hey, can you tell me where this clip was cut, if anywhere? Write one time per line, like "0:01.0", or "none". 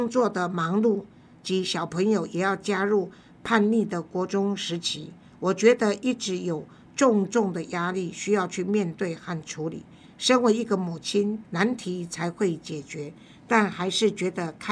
0:10.0
0:11.4